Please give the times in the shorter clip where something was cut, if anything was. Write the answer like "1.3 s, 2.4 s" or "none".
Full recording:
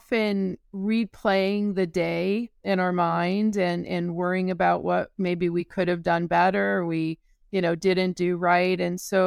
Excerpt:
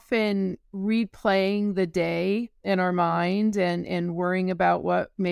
none